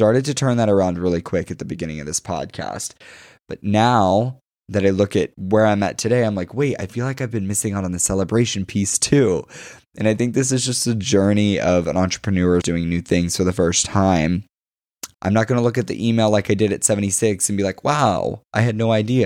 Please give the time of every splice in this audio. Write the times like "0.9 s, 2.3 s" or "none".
12.6 s, 15.1 s